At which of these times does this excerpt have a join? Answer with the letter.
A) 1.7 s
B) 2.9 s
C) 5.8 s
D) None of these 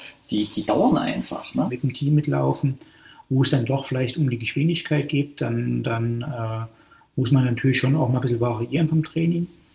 A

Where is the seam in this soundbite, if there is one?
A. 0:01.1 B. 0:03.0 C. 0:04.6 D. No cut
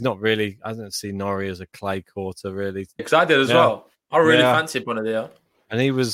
B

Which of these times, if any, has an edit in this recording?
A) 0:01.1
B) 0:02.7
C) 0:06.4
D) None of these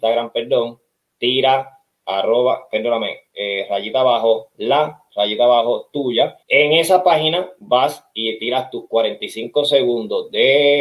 C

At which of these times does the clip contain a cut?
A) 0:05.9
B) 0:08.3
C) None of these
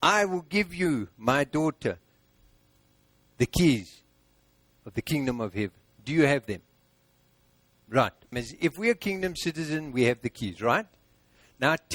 B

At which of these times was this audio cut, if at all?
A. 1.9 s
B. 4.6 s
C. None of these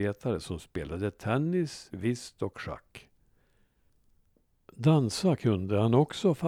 A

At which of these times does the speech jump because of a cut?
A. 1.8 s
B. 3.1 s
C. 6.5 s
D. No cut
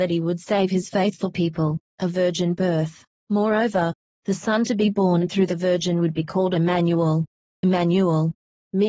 A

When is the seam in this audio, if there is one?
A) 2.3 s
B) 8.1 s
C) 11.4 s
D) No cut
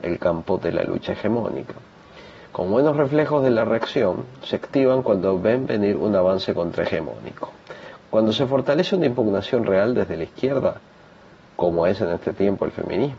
B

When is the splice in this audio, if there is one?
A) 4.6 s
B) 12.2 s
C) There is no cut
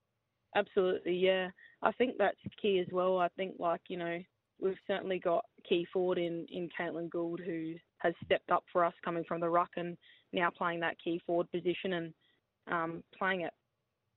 A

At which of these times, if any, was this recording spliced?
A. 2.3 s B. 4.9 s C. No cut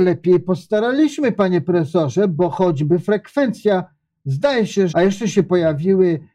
B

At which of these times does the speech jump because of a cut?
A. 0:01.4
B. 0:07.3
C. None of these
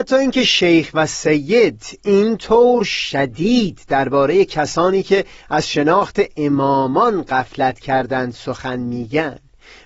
C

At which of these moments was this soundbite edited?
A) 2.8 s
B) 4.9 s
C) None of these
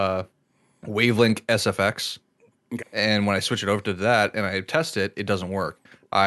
A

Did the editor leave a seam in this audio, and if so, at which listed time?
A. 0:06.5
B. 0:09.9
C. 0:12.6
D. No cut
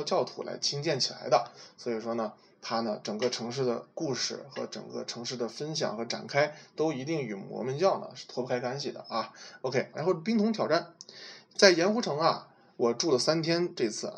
B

